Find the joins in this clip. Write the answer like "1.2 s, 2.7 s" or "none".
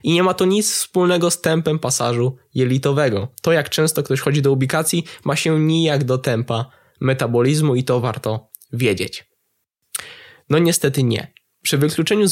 10.4 s